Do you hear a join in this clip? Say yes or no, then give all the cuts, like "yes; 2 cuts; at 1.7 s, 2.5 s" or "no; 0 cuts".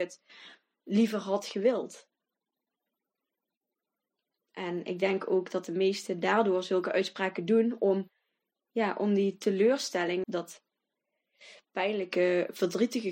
yes; 1 cut; at 10.2 s